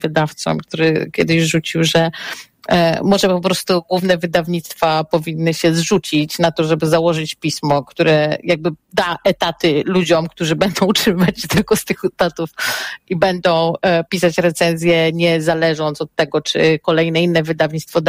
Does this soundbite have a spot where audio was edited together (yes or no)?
no